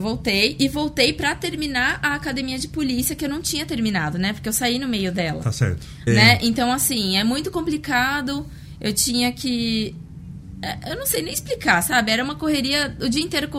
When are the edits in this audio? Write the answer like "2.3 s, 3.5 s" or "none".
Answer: 6.1 s